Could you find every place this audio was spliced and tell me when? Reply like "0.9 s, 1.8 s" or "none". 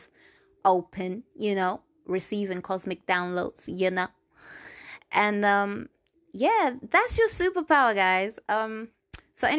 none